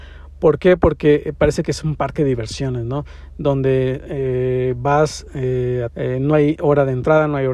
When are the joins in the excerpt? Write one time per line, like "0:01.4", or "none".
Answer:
0:05.9